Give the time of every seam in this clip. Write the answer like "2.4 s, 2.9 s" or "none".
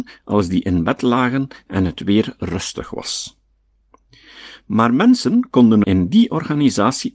5.8 s